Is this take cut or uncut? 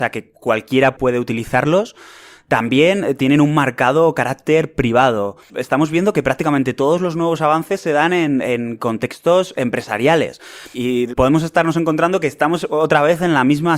cut